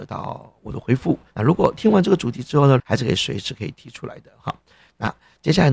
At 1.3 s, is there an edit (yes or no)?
yes